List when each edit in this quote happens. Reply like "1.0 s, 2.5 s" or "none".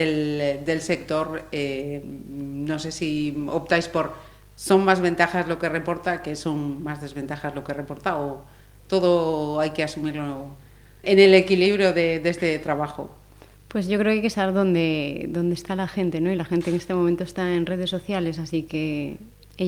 11.0 s